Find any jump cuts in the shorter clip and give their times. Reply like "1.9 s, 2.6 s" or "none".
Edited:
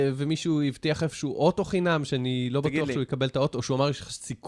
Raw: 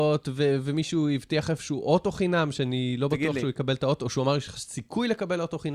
none